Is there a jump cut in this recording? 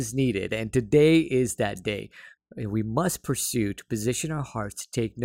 yes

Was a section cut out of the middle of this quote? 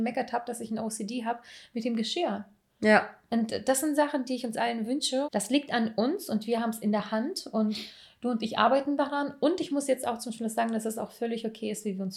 yes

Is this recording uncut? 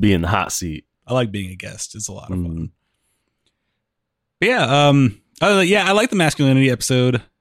no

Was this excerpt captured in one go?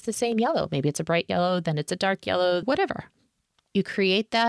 no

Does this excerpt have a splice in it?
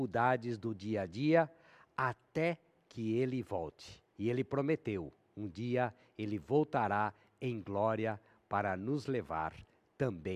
yes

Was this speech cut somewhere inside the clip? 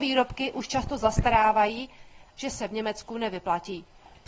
yes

